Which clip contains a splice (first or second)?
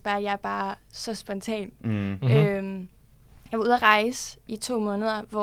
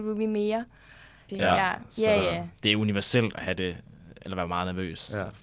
second